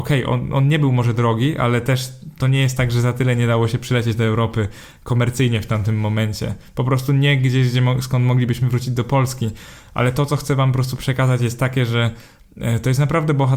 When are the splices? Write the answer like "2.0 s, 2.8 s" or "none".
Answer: none

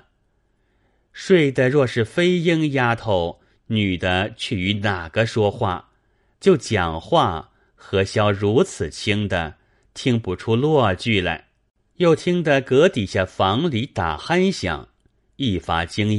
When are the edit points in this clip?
6.3 s, 11.9 s

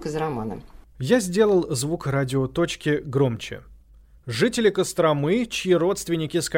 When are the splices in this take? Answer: none

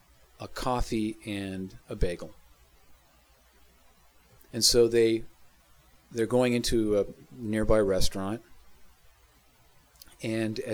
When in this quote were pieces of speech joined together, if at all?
4.4 s

